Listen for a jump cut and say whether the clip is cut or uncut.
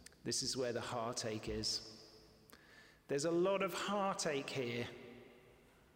uncut